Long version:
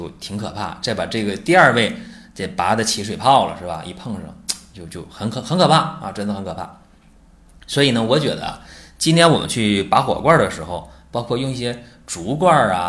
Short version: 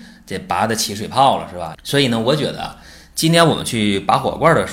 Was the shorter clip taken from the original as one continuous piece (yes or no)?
no